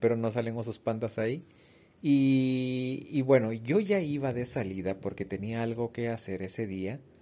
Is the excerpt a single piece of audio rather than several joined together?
yes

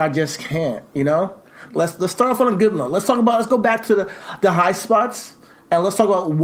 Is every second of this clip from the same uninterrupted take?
no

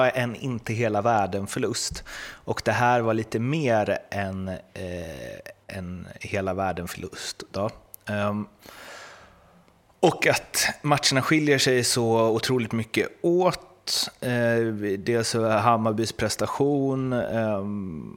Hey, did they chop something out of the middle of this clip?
no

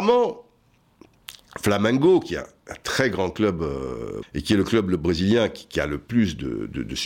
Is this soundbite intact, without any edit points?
no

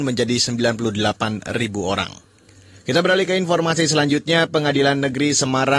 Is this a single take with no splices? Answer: yes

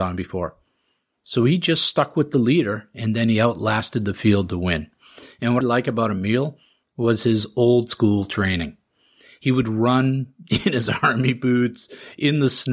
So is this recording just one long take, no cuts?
no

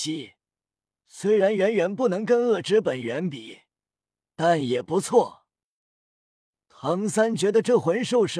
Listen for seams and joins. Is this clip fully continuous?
yes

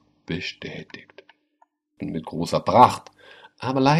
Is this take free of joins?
no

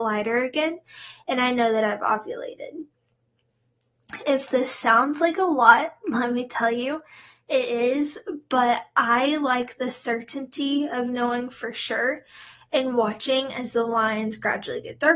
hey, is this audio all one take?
yes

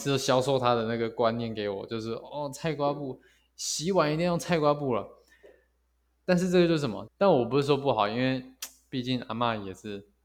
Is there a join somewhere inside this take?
yes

